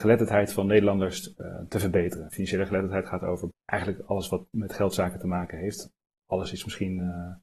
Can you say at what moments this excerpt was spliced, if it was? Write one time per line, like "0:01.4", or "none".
0:03.5